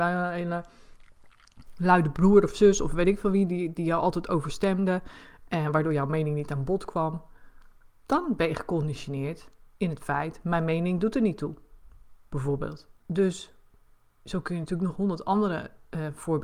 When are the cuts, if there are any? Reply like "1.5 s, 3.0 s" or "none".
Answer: 13.0 s, 14.9 s